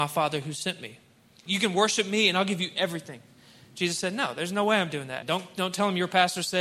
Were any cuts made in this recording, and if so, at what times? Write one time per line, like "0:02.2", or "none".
0:01.5
0:05.2